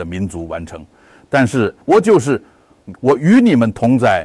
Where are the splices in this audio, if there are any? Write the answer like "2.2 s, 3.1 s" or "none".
1.8 s, 3.0 s